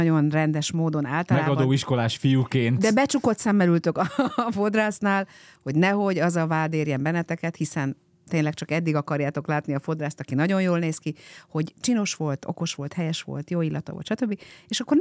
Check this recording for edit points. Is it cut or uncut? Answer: uncut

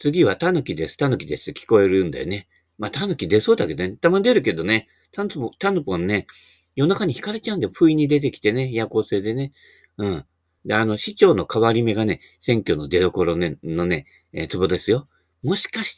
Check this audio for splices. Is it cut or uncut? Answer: cut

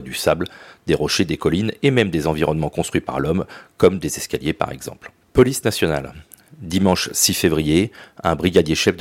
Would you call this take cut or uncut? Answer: cut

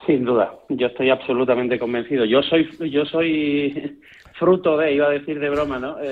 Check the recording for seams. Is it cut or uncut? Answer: uncut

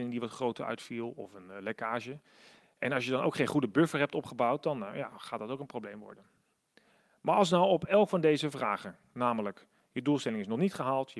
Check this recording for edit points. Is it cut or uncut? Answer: uncut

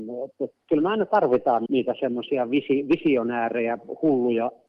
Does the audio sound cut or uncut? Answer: cut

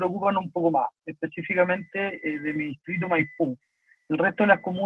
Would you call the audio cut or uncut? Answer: uncut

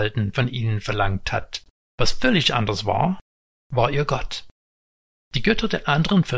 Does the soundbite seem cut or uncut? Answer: cut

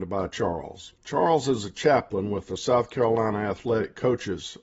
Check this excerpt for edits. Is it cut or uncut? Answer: cut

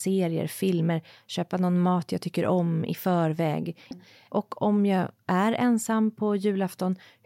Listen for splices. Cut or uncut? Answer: cut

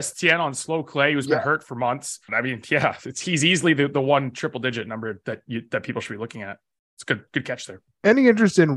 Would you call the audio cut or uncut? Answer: cut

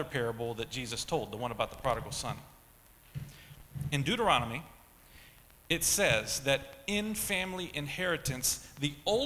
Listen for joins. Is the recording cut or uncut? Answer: uncut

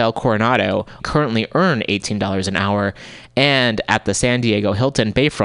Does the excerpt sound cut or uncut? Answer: cut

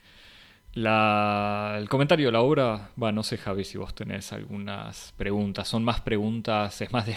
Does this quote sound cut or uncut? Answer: uncut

